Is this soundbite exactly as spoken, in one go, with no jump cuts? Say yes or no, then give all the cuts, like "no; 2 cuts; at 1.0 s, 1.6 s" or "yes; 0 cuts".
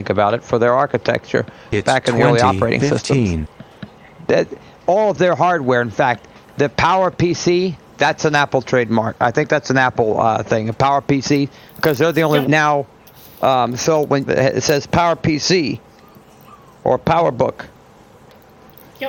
no; 2 cuts; at 12.4 s, 14.3 s